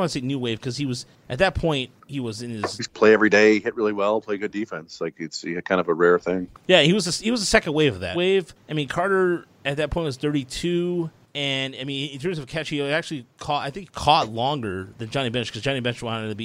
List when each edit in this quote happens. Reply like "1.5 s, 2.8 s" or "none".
8.1 s

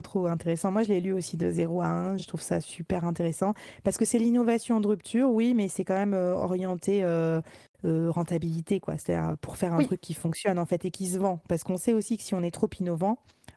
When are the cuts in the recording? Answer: none

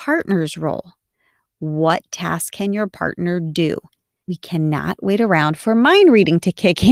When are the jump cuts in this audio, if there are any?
4.2 s

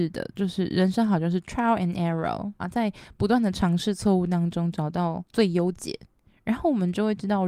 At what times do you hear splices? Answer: 2.6 s, 5.3 s

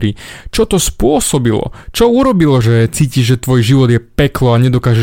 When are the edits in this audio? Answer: 2.6 s

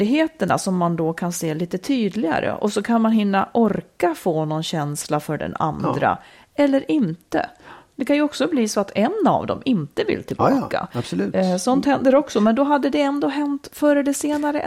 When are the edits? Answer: none

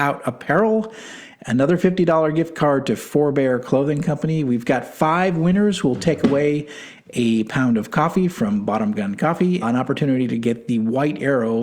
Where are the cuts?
9.6 s

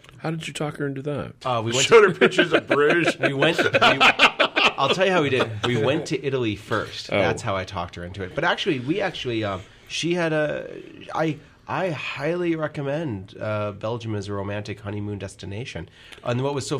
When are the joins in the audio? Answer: 1.4 s

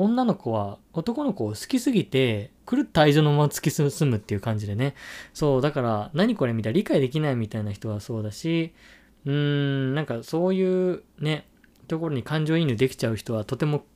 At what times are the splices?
none

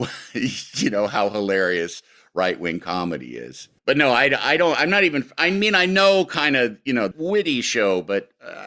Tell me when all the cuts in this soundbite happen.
3.8 s, 7.1 s

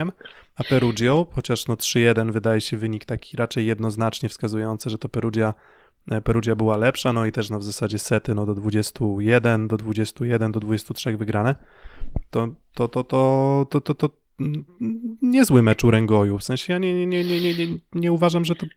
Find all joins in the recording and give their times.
none

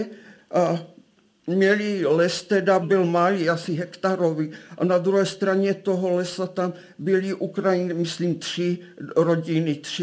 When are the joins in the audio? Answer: 2.8 s

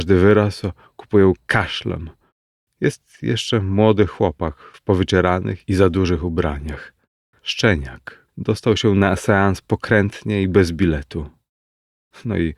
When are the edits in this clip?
2.6 s, 8.3 s

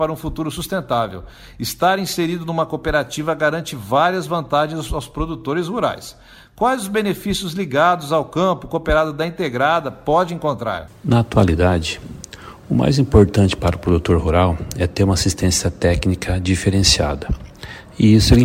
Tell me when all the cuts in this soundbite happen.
none

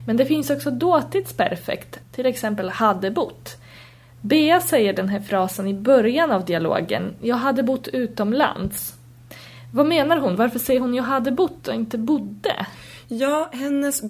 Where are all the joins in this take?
2.0 s

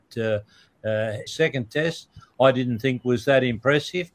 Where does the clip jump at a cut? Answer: 1.3 s

